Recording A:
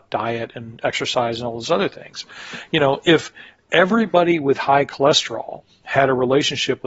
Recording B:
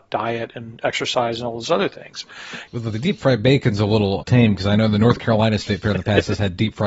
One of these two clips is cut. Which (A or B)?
B